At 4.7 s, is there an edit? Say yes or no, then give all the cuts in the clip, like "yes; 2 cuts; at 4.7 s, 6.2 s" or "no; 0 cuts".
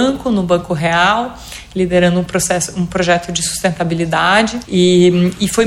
yes; 1 cut; at 4.7 s